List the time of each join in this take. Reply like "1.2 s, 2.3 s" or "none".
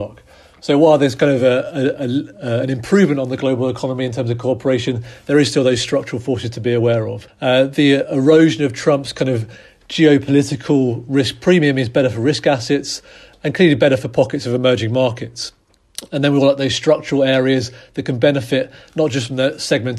none

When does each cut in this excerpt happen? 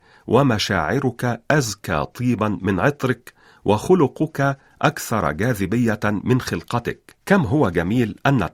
7.2 s

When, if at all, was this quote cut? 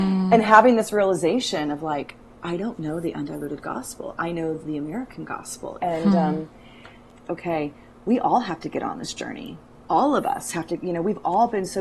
5.8 s, 7.3 s

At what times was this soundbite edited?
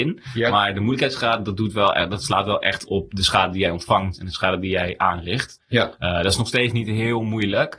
5.6 s

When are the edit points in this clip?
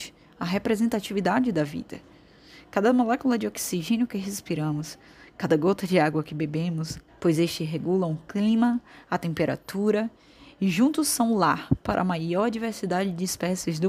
7.1 s

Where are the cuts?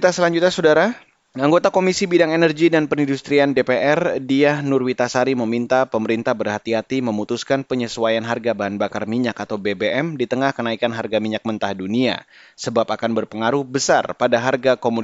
none

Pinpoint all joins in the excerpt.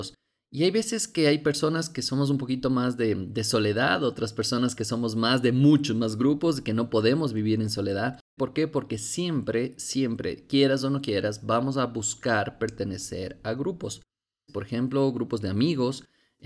8.4 s, 14.5 s

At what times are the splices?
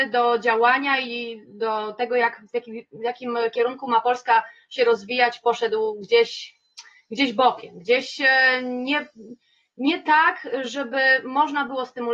none

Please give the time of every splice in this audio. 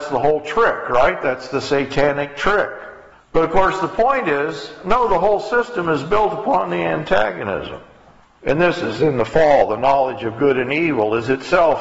3.1 s

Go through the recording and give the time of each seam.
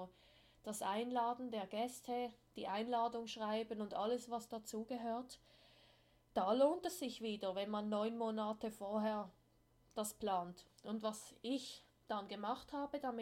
10.7 s

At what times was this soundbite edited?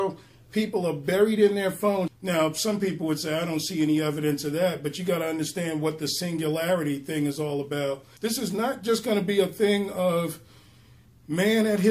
2.1 s, 8.2 s

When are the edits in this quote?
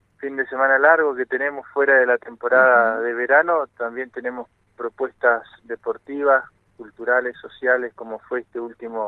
none

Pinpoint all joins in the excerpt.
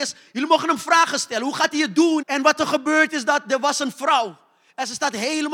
2.2 s

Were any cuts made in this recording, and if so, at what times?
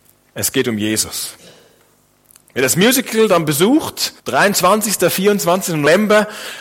4.2 s

